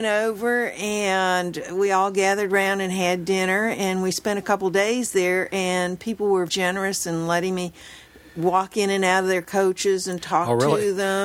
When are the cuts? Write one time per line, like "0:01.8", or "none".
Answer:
0:06.5